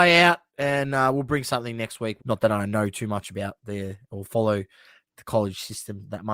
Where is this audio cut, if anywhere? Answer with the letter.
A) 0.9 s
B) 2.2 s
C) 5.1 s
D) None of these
B